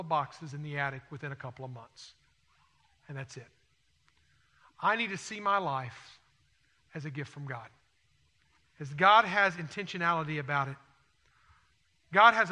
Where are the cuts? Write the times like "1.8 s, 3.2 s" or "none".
none